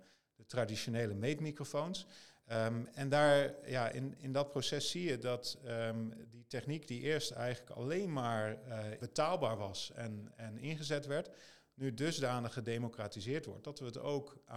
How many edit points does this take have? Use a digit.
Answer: 2